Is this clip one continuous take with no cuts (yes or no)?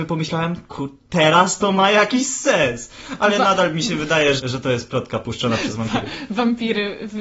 no